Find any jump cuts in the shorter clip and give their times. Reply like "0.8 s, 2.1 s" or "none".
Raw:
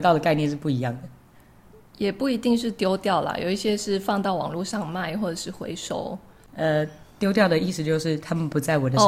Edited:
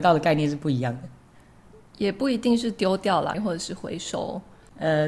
3.3 s

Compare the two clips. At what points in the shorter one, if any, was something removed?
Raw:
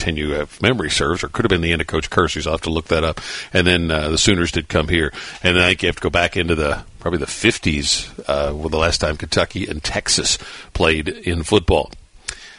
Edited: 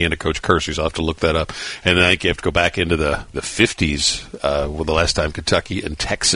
1.8 s, 3.3 s

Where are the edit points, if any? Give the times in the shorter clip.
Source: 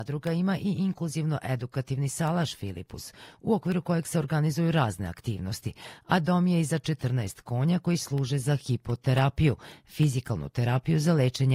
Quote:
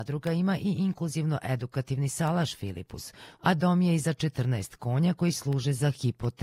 3.4 s

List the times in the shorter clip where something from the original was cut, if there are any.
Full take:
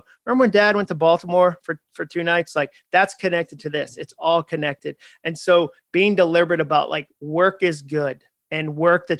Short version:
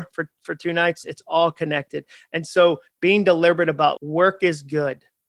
1.0 s, 4.0 s

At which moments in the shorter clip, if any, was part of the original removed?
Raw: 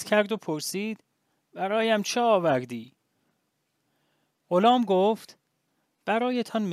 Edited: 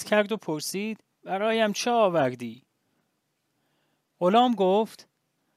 1.1 s

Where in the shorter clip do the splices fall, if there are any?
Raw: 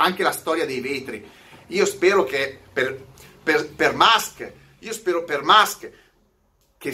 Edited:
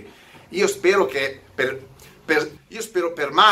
2.6 s

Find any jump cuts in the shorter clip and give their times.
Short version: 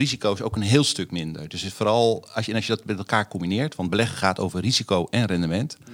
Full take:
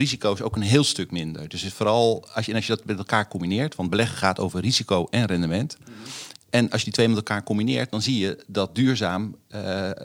none

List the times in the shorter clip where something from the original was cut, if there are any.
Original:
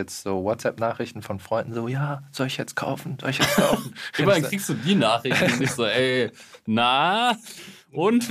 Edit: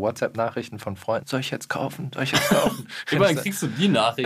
1.2 s

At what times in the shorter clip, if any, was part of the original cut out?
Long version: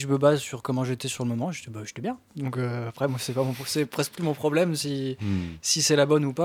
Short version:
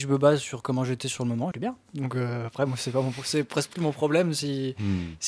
1.5 s

